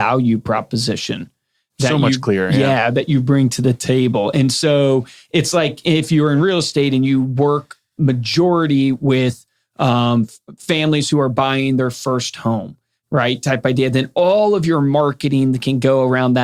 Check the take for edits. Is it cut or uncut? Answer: uncut